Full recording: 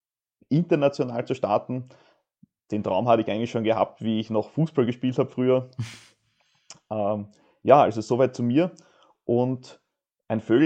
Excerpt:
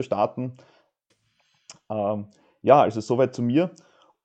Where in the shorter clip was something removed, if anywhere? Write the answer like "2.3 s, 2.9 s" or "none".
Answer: 1.1 s